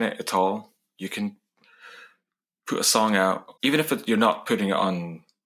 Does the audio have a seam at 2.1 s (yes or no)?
no